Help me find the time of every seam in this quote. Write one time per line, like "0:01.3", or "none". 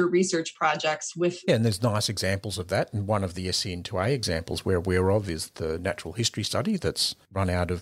0:01.5